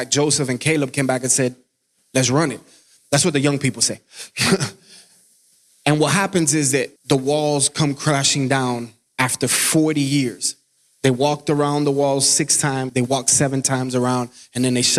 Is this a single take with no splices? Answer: no; 2 cuts; at 7.0 s, 12.9 s

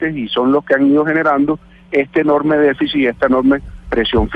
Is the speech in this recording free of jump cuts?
yes; 0 cuts

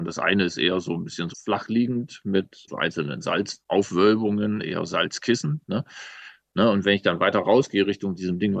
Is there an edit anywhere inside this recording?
yes; 1 cut; at 1.3 s

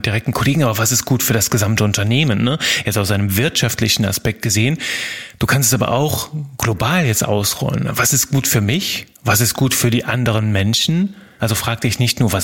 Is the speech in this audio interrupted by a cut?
yes; 1 cut; at 11.4 s

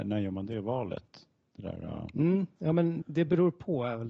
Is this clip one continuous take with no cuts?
no; 1 cut; at 3.0 s

